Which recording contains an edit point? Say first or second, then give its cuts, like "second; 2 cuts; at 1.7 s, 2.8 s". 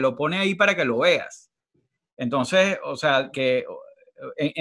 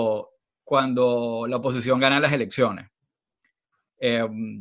first; 1 cut; at 3.3 s